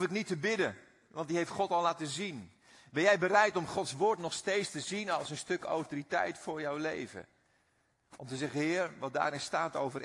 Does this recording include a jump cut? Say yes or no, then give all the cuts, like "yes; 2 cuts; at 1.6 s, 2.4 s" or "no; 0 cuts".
no; 0 cuts